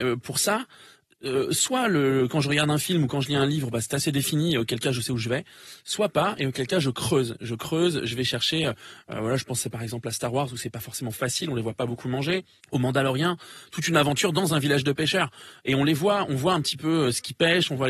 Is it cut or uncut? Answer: uncut